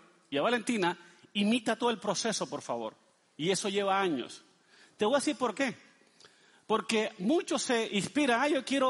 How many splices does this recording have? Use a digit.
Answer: 0